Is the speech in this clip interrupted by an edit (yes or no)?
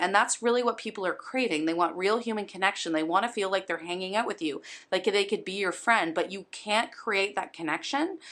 no